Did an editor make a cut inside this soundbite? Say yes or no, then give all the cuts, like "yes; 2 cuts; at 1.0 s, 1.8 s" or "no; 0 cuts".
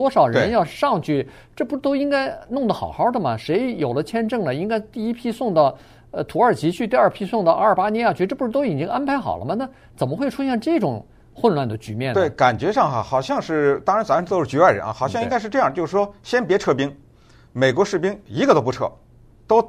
no; 0 cuts